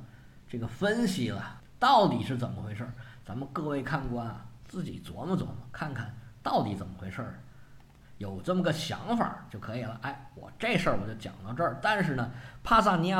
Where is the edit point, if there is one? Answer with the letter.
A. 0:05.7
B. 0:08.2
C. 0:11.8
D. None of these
D